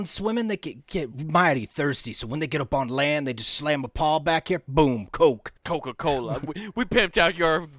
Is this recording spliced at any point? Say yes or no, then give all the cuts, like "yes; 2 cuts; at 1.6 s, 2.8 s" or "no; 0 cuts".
yes; 1 cut; at 5.6 s